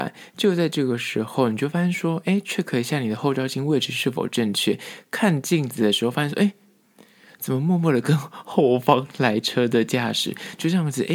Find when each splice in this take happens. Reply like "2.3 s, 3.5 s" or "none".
none